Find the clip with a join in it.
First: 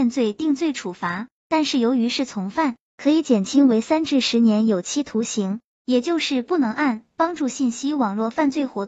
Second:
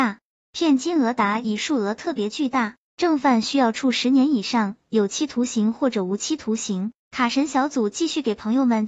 second; 1 cut; at 7.0 s

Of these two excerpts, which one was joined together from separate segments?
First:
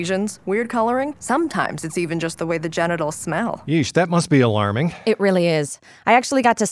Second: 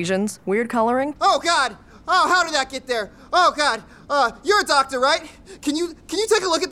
second; 1 cut; at 1.2 s

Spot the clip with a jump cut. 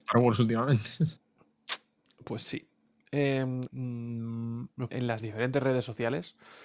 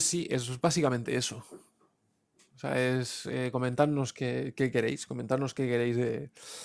first; 2 cuts; at 3.6 s, 4.9 s

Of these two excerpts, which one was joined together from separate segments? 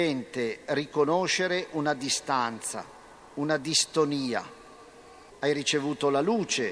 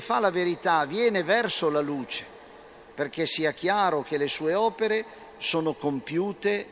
first; 1 cut; at 5.3 s

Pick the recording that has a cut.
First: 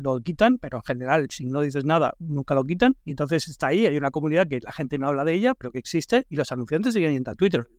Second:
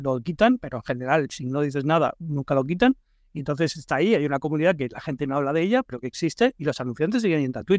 first; 1 cut; at 3.0 s

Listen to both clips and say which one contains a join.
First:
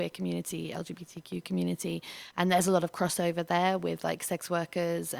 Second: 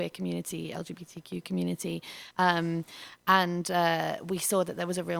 second; 1 cut; at 2.3 s

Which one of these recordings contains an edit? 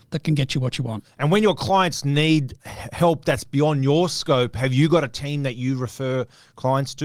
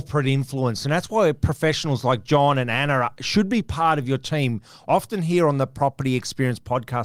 first; 1 cut; at 2.6 s

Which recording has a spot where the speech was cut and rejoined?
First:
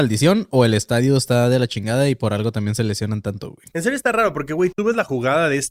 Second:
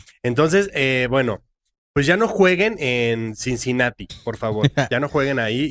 first; 2 cuts; at 3.7 s, 4.7 s

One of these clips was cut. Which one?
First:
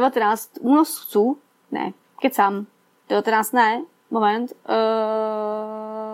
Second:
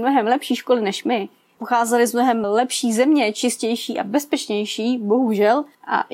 second; 1 cut; at 2.4 s

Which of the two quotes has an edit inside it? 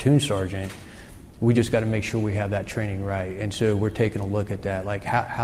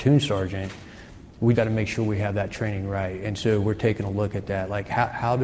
second; 1 cut; at 1.5 s

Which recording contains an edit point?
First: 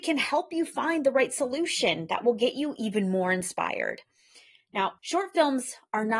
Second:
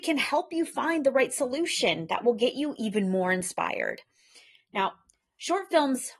first; 1 cut; at 5.0 s

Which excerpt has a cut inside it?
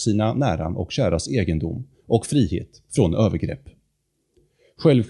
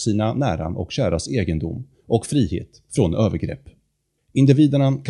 second; 1 cut; at 4.2 s

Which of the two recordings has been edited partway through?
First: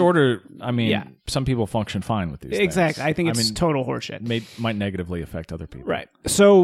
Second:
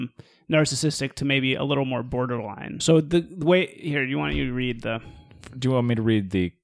second; 1 cut; at 2.8 s

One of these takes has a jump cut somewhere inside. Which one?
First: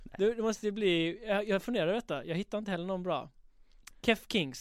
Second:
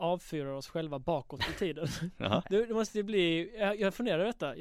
second; 1 cut; at 2.4 s

